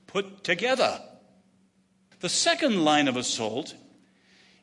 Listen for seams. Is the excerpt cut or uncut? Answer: cut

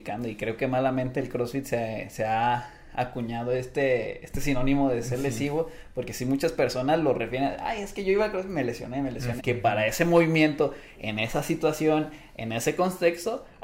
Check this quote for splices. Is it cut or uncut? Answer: cut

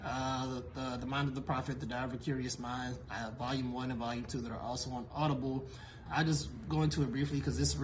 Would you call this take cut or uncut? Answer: cut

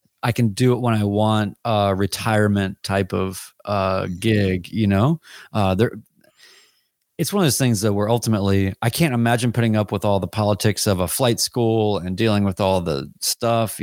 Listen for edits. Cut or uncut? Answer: uncut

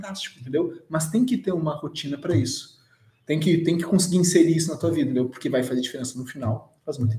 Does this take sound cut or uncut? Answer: uncut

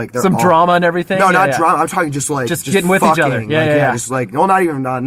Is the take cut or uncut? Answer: uncut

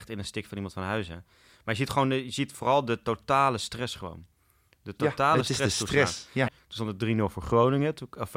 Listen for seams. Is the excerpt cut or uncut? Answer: cut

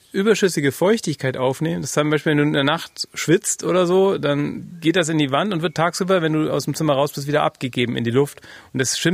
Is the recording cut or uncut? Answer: uncut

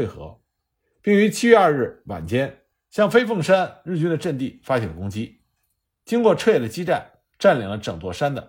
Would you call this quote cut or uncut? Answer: cut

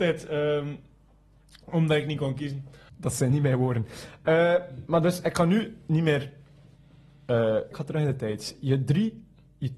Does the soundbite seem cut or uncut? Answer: cut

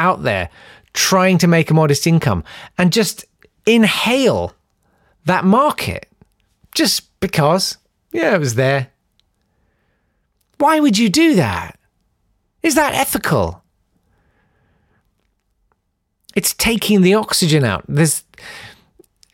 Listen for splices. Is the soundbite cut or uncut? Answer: uncut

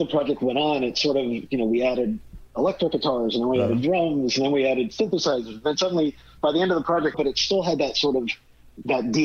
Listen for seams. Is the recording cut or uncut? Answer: cut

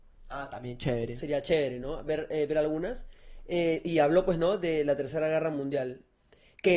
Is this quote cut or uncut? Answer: uncut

